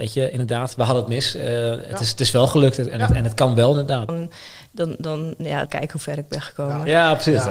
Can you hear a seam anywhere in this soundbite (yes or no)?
yes